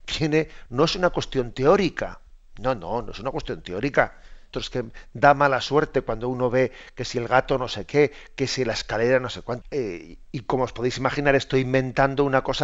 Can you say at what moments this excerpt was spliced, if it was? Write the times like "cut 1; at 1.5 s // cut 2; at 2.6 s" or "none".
cut 1; at 4.5 s // cut 2; at 9.6 s